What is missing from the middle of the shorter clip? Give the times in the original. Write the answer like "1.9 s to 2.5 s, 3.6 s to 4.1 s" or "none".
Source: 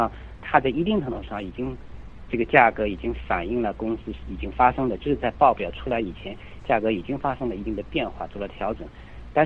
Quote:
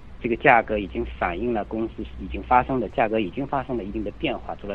5.0 s to 6.6 s